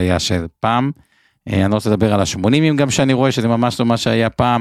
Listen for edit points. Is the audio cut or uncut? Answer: uncut